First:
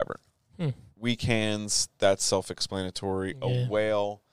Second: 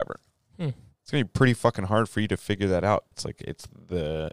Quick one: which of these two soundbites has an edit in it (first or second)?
second